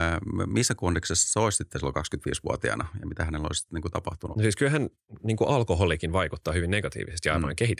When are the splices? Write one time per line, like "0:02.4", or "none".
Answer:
0:04.3